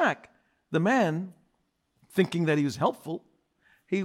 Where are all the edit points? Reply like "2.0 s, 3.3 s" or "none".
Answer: none